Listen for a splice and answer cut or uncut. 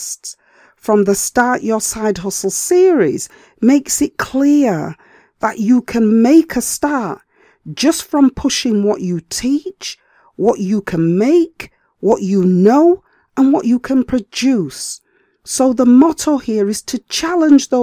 uncut